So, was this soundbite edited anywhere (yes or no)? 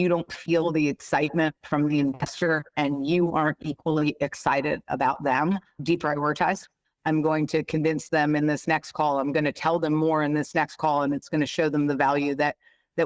yes